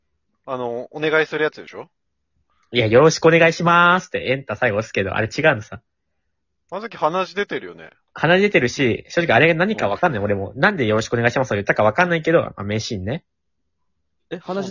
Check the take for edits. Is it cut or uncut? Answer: uncut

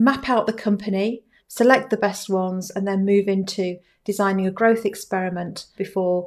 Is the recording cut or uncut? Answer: cut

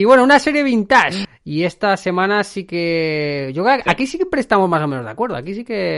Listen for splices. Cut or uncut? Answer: cut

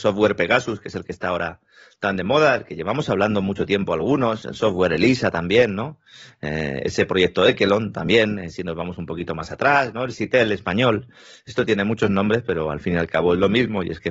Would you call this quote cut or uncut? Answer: uncut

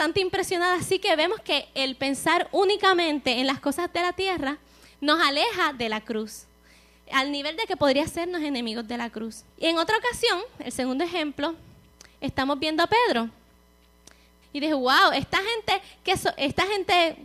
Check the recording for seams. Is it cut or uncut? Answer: cut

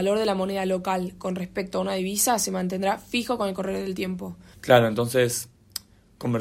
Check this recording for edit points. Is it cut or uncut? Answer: cut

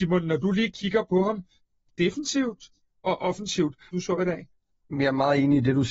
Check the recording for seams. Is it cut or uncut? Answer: cut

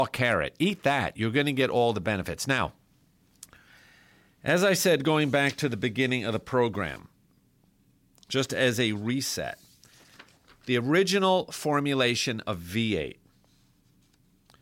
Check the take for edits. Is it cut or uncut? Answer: uncut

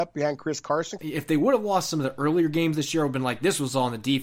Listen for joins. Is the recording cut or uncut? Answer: cut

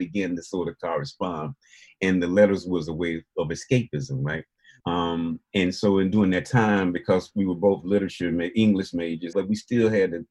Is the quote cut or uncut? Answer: cut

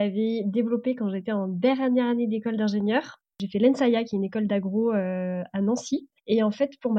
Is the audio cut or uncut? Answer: uncut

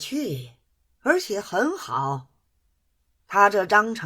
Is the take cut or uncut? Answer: uncut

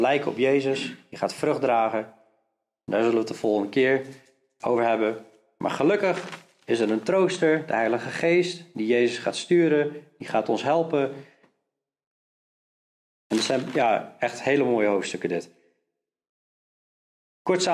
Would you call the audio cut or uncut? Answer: uncut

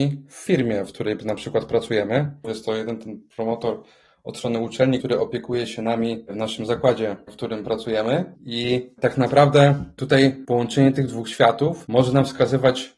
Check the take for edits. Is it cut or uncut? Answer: cut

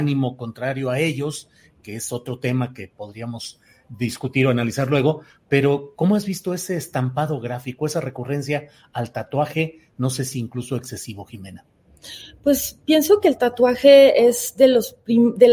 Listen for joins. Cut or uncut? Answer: uncut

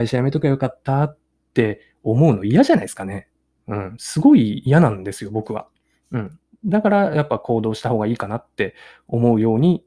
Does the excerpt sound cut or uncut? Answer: uncut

